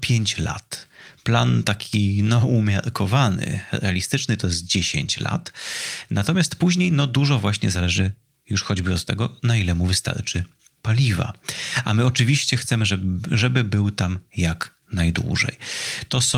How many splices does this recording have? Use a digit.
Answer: 0